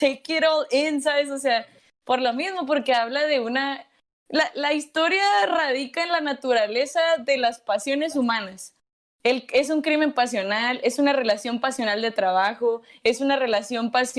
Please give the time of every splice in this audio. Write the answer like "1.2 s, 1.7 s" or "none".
none